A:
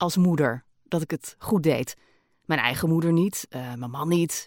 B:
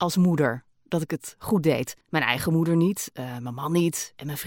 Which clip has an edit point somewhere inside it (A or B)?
B